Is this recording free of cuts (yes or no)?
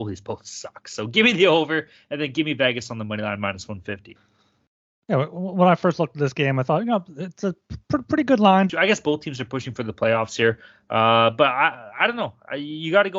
no